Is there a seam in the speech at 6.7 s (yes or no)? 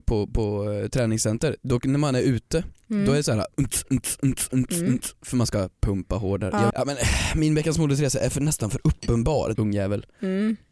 yes